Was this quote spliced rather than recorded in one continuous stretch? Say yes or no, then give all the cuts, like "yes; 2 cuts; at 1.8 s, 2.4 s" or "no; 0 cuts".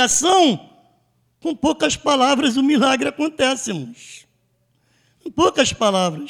no; 0 cuts